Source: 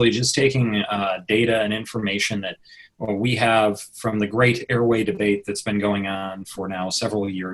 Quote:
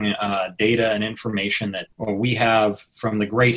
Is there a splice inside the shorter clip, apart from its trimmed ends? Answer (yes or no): yes